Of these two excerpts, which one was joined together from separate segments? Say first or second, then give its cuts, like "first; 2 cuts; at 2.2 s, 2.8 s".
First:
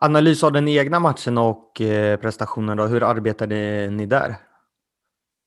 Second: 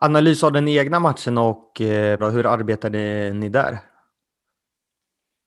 second; 1 cut; at 2.2 s